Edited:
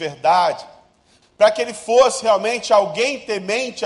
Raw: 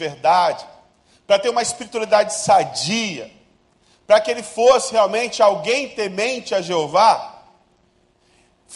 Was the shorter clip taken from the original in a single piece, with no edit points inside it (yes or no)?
no